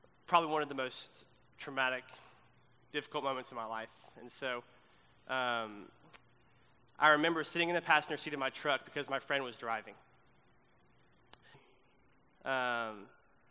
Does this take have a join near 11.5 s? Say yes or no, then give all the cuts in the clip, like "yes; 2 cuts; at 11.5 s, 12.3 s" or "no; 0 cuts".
yes; 1 cut; at 11.5 s